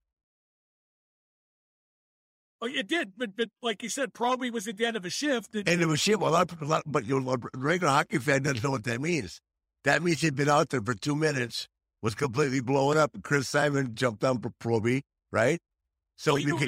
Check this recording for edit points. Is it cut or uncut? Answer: uncut